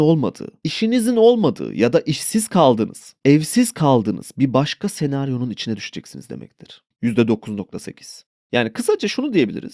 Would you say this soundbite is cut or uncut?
cut